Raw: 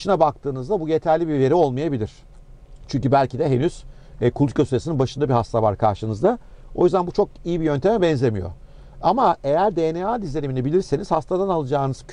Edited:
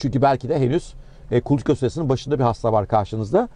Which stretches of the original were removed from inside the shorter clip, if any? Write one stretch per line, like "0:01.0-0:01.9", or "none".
none